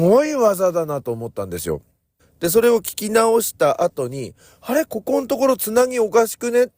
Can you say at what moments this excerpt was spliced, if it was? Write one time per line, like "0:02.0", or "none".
0:02.2